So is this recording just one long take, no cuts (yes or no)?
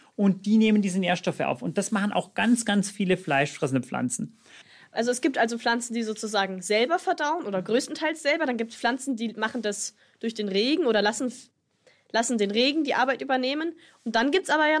yes